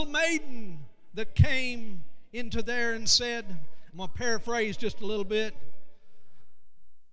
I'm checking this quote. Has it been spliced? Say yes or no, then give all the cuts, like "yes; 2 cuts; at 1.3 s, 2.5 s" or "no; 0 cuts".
yes; 1 cut; at 3.9 s